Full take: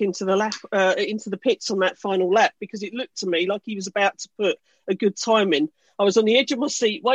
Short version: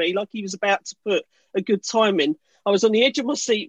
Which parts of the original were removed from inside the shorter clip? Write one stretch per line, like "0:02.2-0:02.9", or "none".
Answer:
none